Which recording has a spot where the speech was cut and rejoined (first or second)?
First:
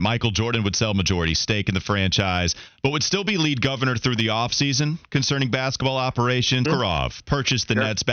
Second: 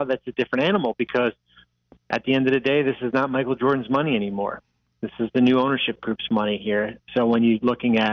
first